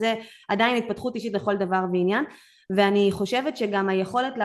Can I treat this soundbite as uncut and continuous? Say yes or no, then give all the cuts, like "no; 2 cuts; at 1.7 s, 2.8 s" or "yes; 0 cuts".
yes; 0 cuts